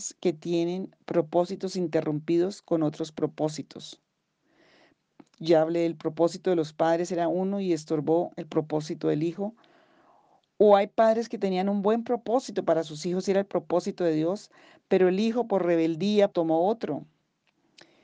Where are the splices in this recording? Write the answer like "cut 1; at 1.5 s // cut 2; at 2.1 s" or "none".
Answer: cut 1; at 16.3 s